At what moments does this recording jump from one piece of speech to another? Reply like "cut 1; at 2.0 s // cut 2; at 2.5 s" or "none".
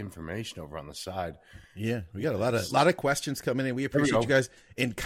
none